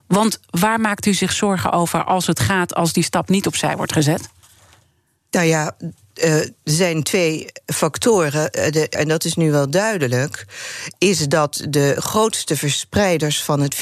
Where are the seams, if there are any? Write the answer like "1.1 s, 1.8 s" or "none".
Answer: 8.9 s

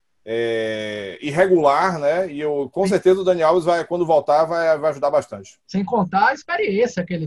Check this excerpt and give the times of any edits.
none

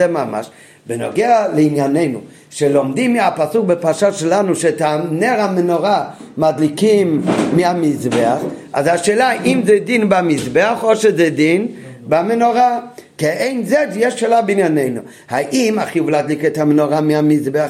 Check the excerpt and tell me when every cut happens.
none

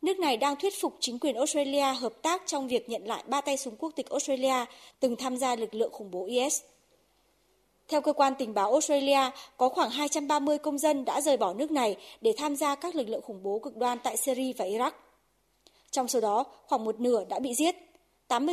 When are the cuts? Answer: none

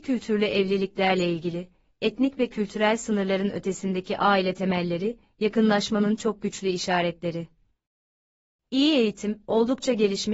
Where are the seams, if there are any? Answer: none

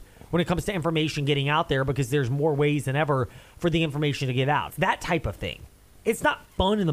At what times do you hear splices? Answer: 4.7 s

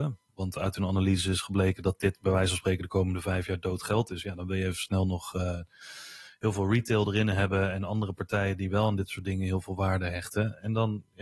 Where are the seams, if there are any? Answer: none

